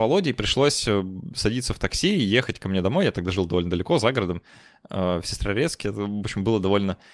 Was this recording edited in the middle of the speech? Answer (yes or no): yes